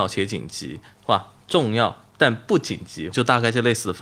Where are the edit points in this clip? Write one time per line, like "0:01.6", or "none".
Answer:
0:02.1
0:03.1